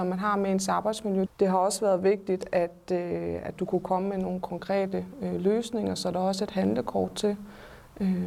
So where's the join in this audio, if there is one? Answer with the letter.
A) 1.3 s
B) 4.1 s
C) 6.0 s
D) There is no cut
A